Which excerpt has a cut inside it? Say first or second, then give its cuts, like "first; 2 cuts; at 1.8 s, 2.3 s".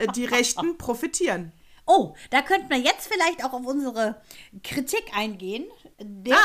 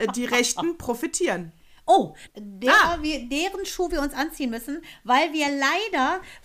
second; 1 cut; at 2.3 s